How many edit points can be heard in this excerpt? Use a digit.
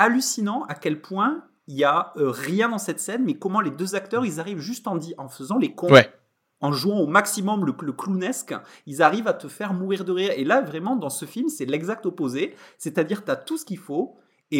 0